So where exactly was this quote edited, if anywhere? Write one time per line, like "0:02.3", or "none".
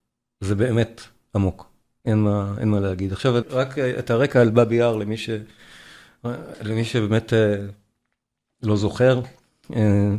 0:03.4